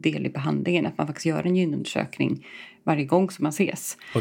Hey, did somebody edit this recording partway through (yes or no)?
no